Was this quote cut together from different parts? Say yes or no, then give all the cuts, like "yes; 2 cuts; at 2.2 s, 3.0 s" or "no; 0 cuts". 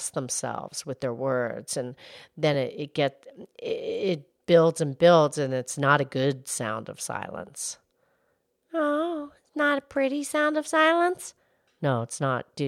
no; 0 cuts